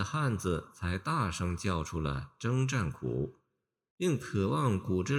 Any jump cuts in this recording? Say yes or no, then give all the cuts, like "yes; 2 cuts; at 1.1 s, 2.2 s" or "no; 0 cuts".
no; 0 cuts